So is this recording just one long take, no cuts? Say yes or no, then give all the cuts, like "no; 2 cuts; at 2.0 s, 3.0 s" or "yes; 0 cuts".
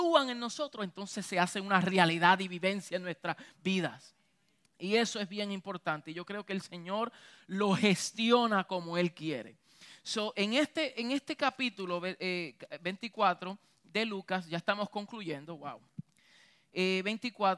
yes; 0 cuts